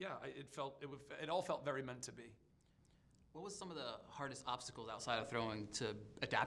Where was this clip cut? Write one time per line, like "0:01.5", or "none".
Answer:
none